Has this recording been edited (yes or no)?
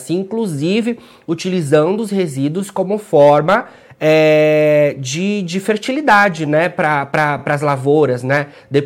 no